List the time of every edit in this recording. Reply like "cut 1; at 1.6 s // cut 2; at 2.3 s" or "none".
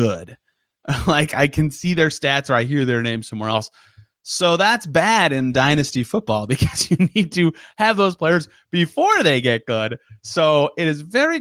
none

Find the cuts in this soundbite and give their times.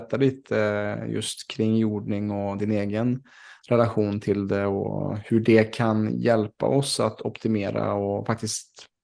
none

